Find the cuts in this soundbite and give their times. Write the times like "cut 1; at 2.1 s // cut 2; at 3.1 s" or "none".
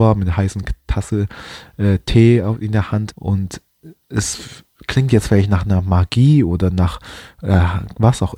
cut 1; at 3.1 s